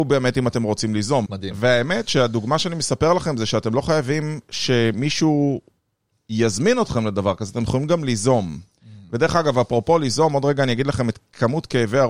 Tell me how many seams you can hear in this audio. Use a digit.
1